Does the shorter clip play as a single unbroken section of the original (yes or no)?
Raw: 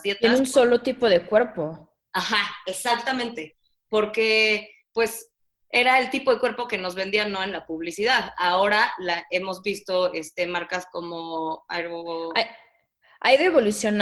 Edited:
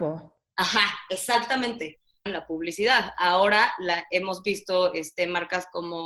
no